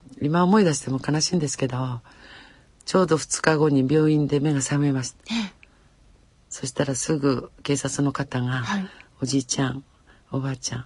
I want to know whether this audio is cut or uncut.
uncut